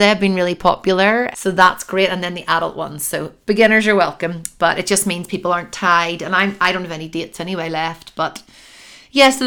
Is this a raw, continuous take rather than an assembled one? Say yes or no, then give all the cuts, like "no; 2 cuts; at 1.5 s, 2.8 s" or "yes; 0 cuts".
no; 1 cut; at 1.3 s